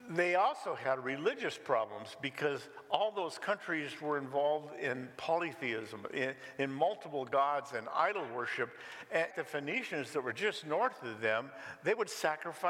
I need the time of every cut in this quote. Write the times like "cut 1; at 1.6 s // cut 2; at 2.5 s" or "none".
cut 1; at 9.3 s

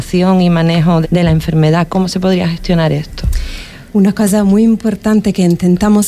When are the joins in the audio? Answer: cut 1; at 1.0 s

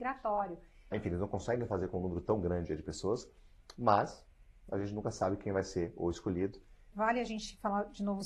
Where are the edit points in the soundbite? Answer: cut 1; at 0.9 s // cut 2; at 6.9 s

